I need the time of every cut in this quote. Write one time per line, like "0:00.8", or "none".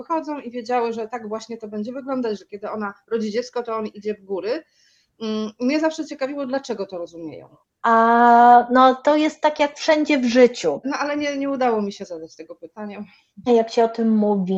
0:07.8
0:10.8
0:13.5

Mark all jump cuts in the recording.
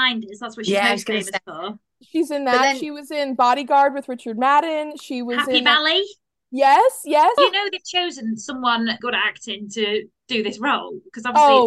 0:07.4
0:09.0

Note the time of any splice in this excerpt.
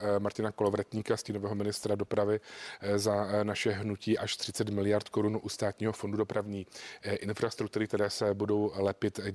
none

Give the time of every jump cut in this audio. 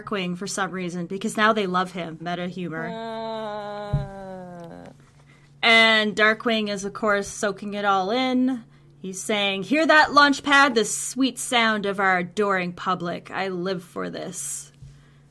0:02.2

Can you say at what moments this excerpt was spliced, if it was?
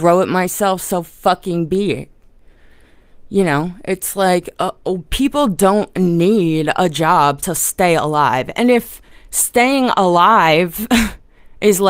none

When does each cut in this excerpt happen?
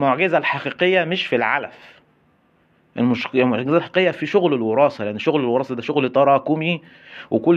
none

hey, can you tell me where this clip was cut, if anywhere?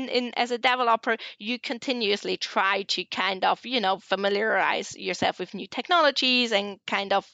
none

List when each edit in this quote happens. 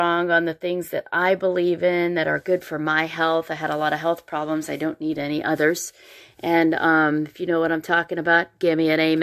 none

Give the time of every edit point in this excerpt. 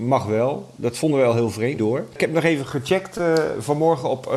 0:01.8

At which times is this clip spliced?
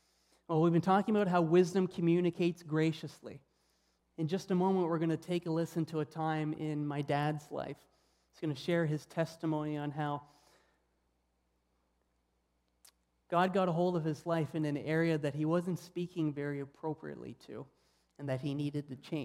0:04.0

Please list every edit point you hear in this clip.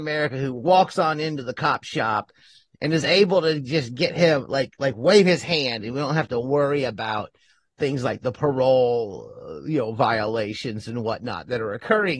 none

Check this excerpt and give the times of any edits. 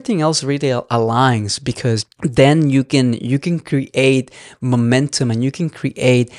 0:02.1

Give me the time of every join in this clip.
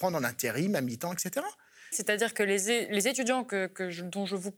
0:01.9

